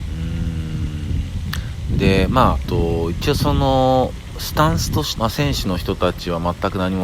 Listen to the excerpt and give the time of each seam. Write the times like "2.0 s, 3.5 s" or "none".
2.6 s, 5.2 s

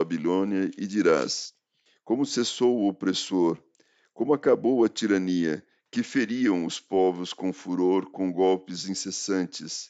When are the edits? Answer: 5.9 s

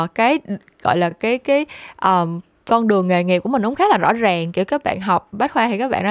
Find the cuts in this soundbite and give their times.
none

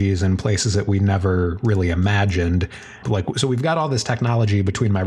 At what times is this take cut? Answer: 3.0 s

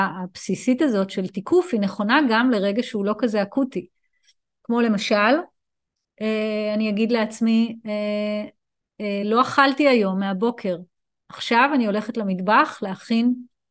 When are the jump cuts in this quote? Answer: none

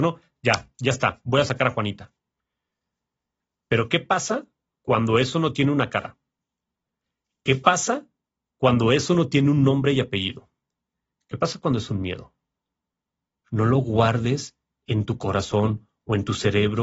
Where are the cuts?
13.4 s

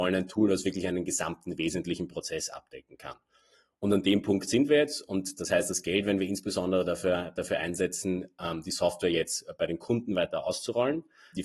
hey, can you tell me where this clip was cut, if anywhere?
none

